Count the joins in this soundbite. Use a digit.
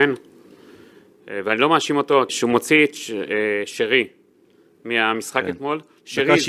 1